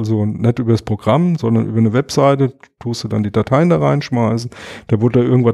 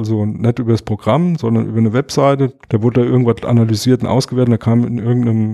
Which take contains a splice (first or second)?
second